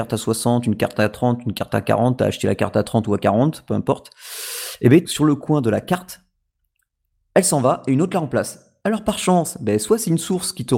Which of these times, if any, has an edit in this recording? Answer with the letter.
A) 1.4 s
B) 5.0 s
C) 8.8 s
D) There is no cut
B